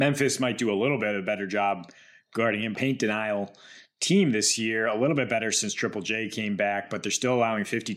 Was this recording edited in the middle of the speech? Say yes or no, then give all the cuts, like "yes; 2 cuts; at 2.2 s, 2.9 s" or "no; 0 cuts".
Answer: yes; 1 cut; at 2.7 s